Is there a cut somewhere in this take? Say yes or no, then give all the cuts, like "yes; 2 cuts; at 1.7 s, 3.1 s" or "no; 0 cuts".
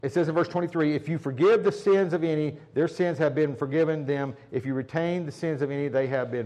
no; 0 cuts